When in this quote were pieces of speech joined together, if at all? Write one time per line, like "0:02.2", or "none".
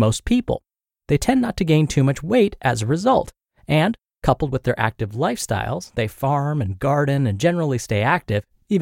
none